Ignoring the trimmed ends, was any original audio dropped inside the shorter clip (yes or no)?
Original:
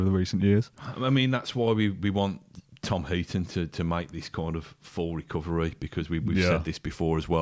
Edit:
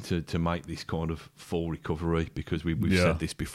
no